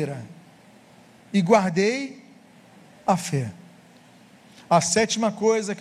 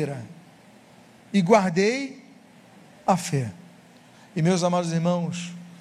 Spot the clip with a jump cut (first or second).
second